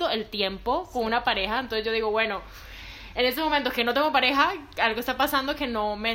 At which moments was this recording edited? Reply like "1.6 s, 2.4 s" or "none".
none

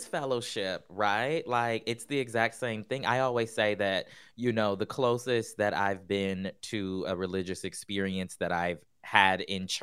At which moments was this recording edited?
none

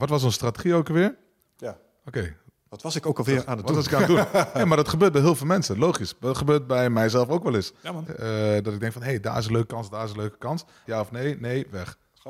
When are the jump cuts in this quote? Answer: 1.6 s, 8.1 s, 10.8 s

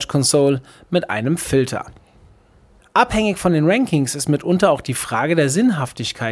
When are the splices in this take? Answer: 2.8 s

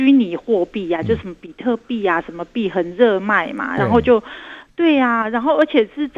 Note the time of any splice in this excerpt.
4.7 s

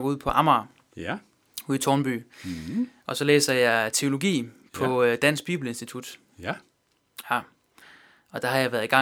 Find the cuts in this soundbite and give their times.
none

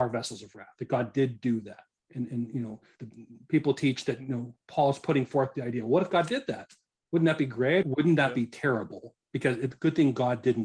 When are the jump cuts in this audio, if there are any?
3.0 s, 7.8 s

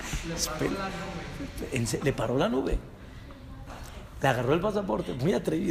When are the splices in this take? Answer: none

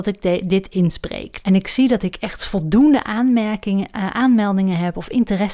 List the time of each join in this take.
1.4 s

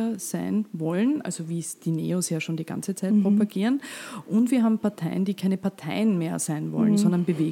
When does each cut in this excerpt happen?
none

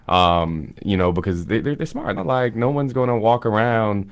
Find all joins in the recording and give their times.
2.2 s

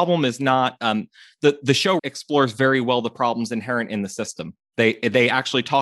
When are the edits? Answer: 2.0 s

